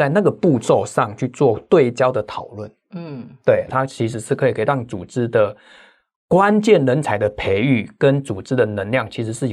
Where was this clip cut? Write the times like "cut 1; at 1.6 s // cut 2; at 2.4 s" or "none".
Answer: cut 1; at 3.7 s